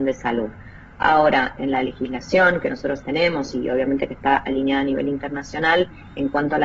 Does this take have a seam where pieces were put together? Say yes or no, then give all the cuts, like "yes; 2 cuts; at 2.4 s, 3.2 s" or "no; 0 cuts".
yes; 1 cut; at 1.6 s